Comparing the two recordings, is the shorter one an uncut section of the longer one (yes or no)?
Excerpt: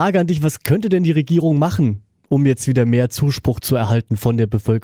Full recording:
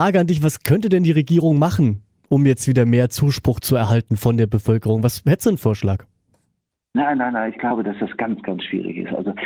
yes